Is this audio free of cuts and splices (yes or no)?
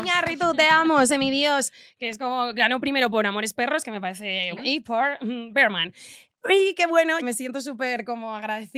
no